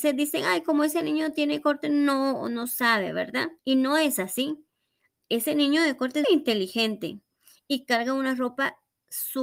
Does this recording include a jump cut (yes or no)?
yes